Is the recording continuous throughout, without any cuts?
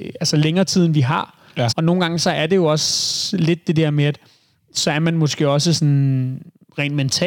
no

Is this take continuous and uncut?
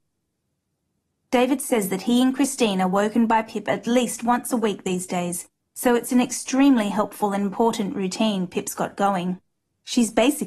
yes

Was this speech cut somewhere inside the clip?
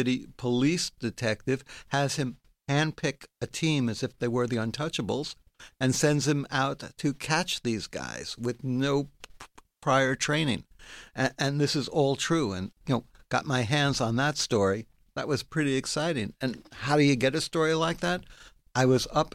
yes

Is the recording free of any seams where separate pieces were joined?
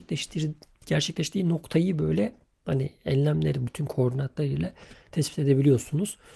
no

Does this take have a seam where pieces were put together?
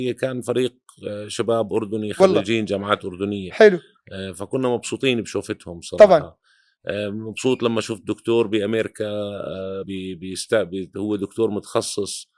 yes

